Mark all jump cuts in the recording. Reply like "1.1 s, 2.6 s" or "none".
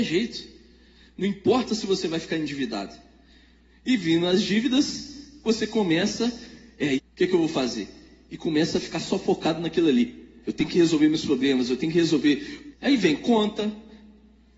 7.0 s, 10.4 s, 12.7 s